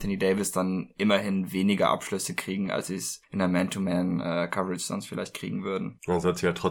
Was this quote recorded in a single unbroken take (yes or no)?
yes